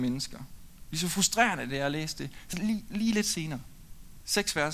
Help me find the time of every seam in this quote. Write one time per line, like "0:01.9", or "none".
none